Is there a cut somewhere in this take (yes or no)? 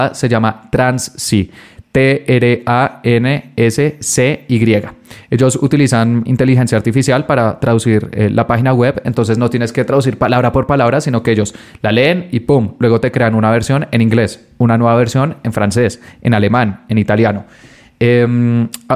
no